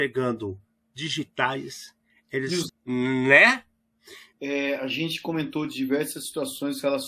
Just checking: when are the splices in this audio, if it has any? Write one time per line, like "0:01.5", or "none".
0:02.7
0:04.3